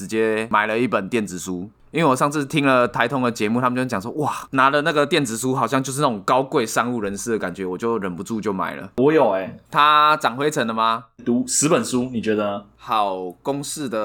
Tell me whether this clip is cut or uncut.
cut